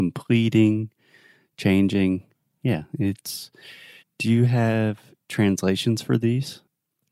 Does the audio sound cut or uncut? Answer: cut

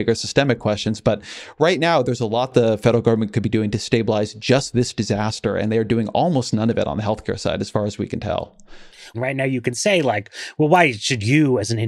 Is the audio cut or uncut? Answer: cut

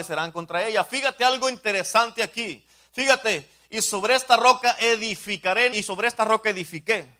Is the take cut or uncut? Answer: cut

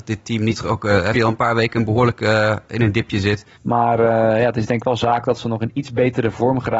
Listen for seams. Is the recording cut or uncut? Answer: cut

